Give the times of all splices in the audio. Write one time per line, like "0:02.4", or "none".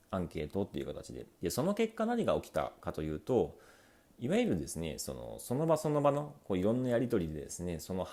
0:01.4